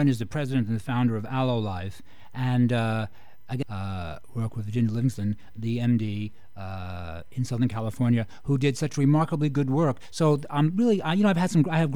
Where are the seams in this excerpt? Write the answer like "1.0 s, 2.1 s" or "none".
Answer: 3.6 s